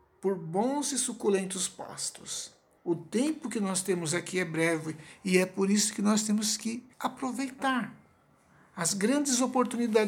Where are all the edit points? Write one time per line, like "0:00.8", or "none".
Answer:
0:02.8
0:06.9